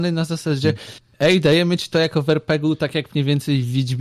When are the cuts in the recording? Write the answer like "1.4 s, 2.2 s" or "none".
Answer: none